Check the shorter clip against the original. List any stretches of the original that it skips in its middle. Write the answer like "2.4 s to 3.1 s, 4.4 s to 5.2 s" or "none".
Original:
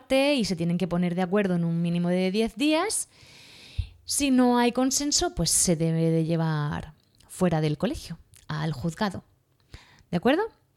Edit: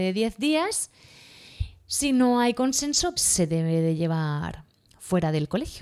5.3 s to 5.5 s